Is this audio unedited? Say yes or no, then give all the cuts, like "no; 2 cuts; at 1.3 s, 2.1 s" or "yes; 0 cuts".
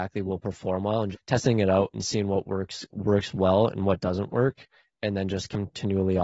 no; 1 cut; at 1.1 s